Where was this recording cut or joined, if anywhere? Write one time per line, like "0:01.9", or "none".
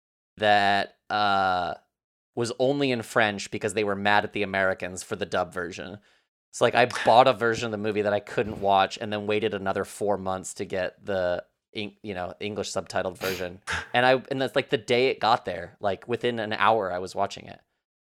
none